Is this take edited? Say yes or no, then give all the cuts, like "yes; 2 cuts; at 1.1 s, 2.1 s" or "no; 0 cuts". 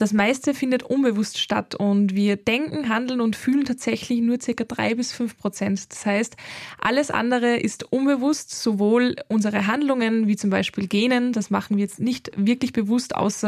no; 0 cuts